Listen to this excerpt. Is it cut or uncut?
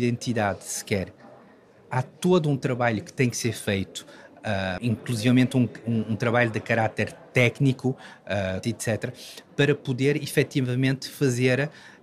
cut